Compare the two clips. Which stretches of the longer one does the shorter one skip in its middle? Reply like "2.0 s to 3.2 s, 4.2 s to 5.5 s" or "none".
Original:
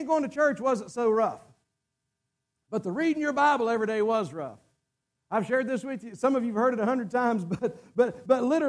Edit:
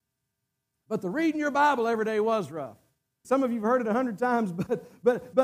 5.1 s to 6.2 s